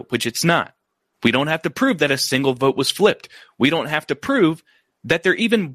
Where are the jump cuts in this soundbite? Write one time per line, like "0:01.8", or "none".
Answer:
0:01.1